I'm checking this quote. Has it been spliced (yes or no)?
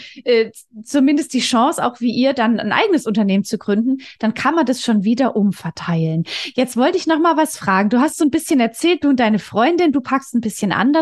no